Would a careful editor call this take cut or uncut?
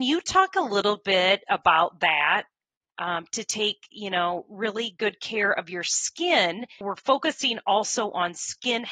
cut